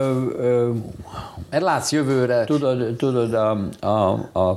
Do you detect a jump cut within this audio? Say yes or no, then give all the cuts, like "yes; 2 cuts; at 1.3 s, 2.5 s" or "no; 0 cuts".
no; 0 cuts